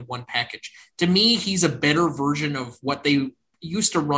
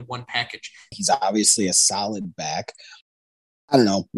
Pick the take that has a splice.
second; 1 cut; at 0.9 s

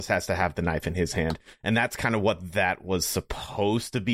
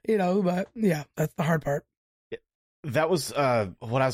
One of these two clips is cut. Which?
second; 1 cut; at 1.1 s

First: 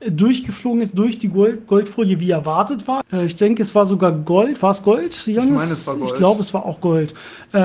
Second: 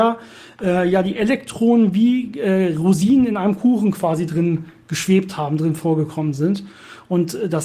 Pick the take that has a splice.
first; 1 cut; at 3.0 s

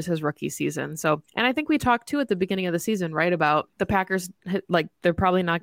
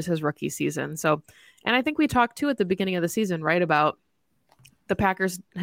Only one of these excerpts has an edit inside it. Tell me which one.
first; 2 cuts; at 1.3 s, 3.7 s

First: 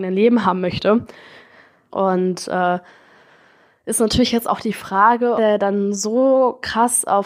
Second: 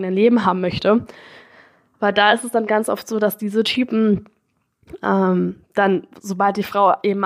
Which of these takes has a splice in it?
first; 2 cuts; at 1.9 s, 5.4 s

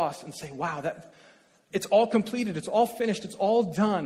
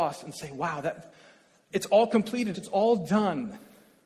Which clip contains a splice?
second; 1 cut; at 2.5 s

